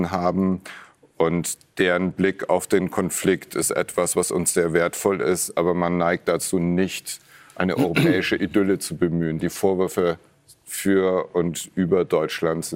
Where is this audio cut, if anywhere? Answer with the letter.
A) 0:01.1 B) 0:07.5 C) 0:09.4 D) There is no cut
C